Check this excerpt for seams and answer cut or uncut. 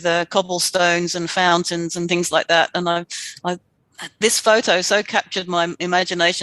uncut